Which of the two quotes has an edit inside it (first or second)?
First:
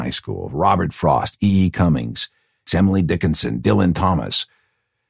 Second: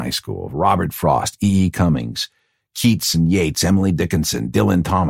first